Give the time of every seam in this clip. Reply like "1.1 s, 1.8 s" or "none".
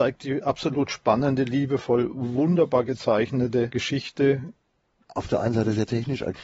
5.0 s